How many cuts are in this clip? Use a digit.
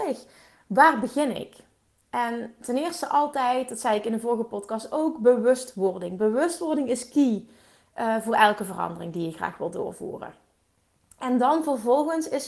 0